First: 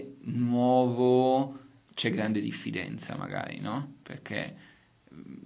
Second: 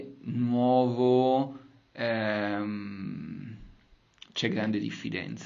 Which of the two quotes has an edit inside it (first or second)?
first